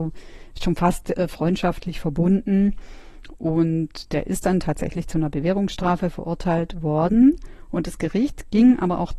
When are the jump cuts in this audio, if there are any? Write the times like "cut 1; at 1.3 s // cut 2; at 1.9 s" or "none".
none